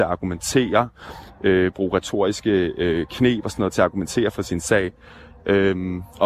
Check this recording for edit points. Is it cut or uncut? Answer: uncut